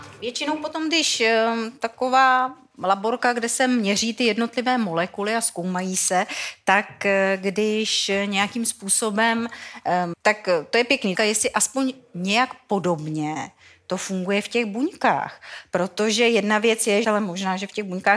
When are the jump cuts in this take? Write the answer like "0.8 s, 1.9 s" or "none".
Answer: 10.1 s, 11.2 s, 17.0 s

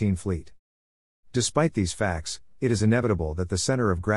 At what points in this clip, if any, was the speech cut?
none

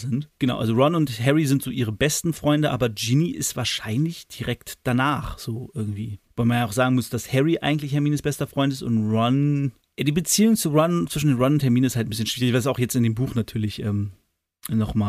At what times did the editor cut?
none

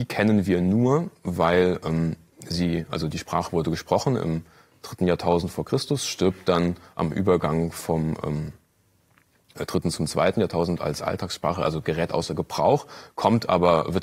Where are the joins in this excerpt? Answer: none

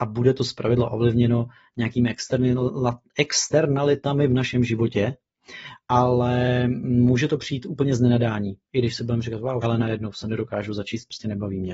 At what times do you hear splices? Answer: 9.6 s

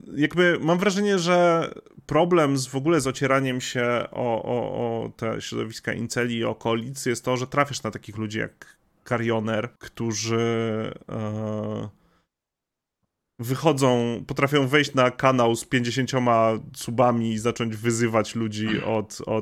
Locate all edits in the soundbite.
9.8 s

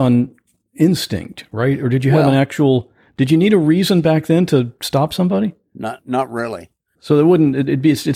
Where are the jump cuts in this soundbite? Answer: none

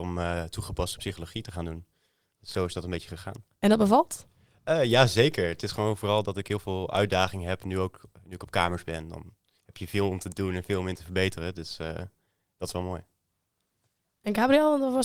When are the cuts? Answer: none

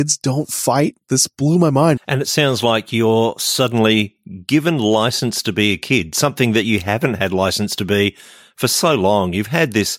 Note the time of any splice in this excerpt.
2.0 s

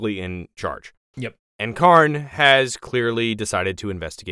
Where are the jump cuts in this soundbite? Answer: none

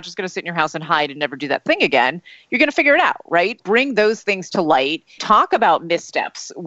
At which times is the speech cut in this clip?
3.6 s, 5.2 s

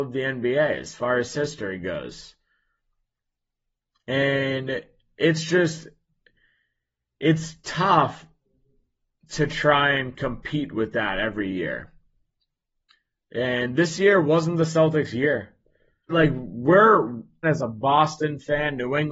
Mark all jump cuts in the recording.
16.1 s, 17.4 s

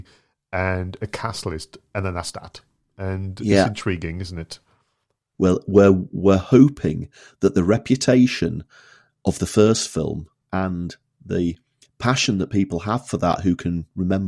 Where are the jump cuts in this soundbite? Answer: 5.3 s, 10.4 s

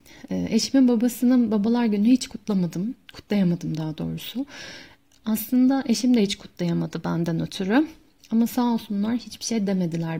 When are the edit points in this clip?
none

